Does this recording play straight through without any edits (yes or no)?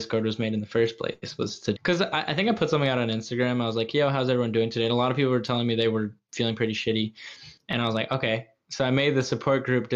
no